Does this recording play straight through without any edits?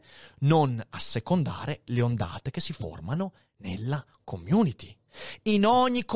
yes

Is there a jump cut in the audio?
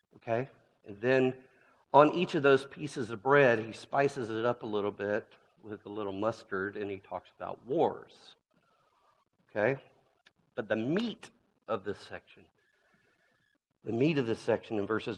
no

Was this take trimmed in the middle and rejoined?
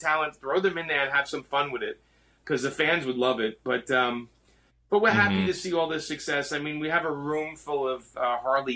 no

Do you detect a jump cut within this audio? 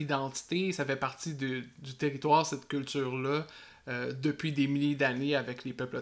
no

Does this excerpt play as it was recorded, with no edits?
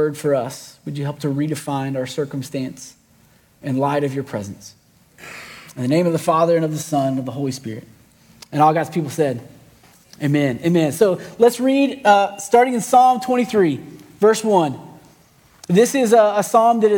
yes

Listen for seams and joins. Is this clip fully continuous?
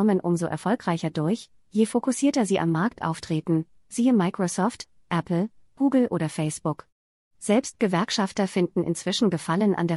yes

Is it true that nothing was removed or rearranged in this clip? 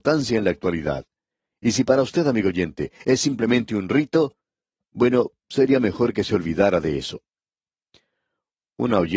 yes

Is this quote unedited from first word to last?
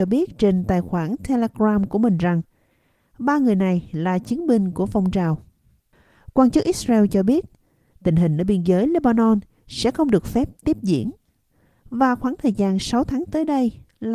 yes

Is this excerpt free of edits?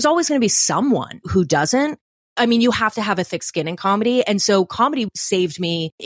yes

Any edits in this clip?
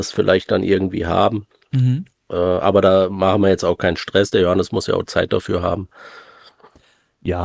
no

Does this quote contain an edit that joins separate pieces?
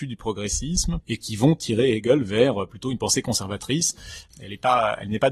yes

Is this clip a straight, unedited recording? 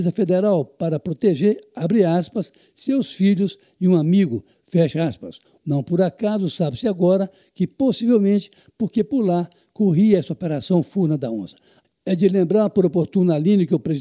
no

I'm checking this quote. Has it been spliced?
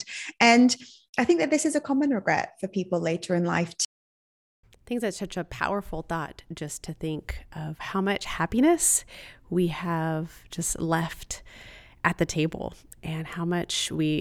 no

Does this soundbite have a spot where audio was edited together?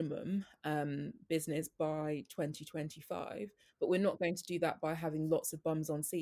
no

